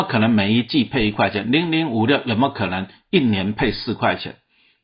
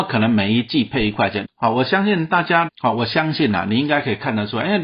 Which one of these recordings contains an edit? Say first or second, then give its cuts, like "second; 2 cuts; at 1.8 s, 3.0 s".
second; 2 cuts; at 1.4 s, 2.7 s